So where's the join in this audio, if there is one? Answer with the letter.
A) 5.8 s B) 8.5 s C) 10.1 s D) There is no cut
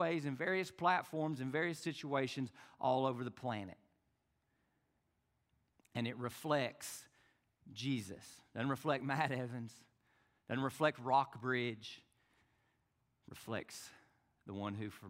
A